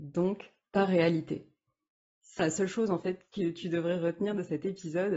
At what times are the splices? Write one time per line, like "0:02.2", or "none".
0:02.4